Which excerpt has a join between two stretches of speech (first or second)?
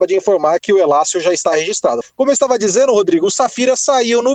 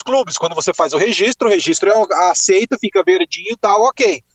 first